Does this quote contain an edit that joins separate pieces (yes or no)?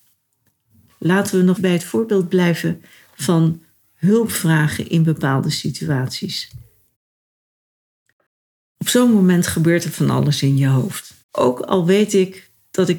yes